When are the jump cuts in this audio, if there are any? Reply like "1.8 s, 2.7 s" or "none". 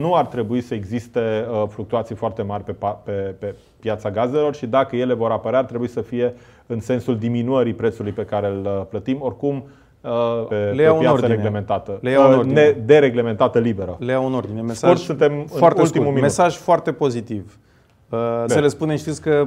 10.5 s, 18.5 s